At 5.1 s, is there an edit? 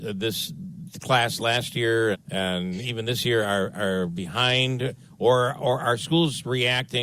no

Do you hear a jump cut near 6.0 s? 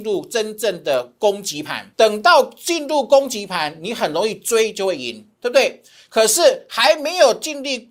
no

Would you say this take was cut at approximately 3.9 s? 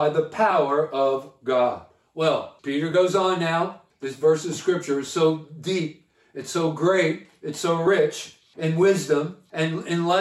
no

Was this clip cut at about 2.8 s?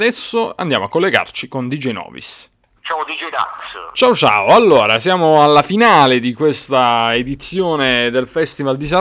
yes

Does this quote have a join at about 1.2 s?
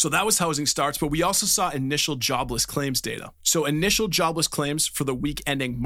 no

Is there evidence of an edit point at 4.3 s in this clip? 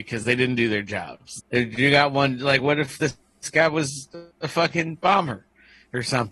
yes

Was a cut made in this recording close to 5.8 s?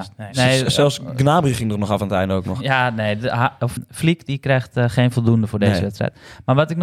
no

